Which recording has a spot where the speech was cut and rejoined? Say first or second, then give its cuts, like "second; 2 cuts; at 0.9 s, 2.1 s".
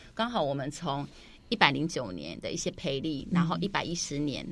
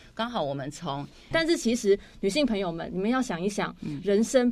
second; 1 cut; at 1.3 s